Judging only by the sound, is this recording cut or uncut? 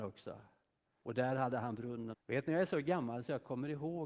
cut